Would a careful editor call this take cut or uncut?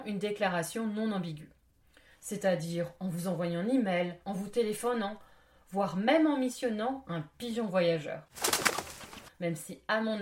cut